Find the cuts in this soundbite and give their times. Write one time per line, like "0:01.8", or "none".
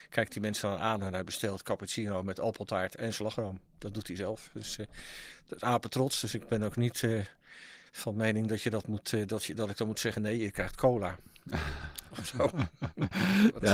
none